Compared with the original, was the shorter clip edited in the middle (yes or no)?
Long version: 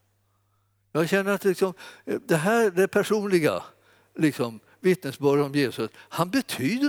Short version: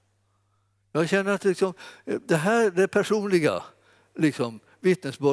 no